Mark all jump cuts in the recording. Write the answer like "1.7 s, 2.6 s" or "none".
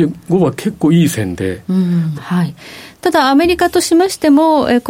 2.1 s